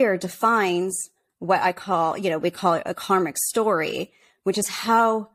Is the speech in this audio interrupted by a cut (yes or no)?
yes